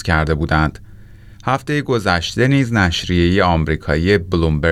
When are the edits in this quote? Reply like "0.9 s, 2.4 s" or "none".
1.3 s